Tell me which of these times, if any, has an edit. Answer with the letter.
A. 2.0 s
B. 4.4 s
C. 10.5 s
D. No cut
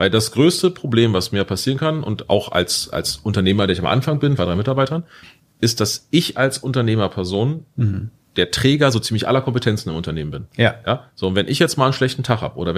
B